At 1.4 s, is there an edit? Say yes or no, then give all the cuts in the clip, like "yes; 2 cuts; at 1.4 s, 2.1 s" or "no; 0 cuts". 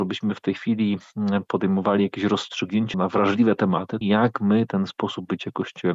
no; 2 cuts; at 2.9 s, 4.0 s